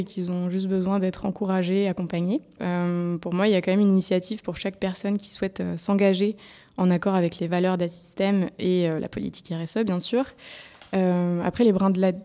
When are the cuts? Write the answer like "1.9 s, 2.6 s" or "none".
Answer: 2.6 s